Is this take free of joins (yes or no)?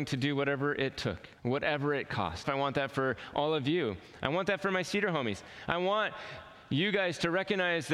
no